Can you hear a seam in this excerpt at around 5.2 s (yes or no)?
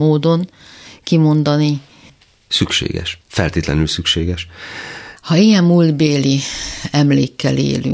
yes